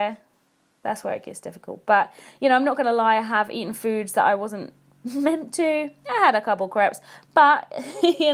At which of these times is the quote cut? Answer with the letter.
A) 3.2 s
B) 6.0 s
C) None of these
C